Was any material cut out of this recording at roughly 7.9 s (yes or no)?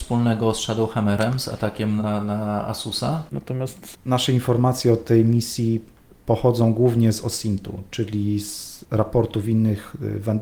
no